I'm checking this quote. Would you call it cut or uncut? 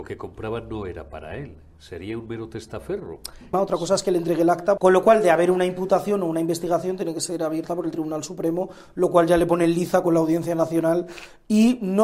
cut